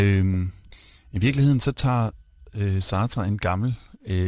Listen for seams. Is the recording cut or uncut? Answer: uncut